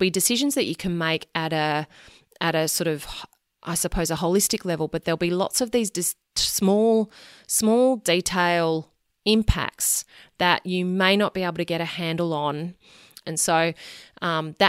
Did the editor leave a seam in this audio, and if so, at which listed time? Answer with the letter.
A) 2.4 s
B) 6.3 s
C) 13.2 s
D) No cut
C